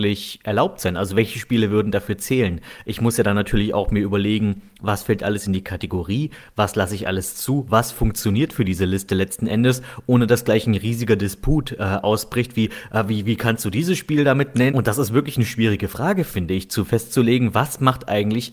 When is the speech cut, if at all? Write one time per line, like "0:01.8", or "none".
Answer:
0:14.7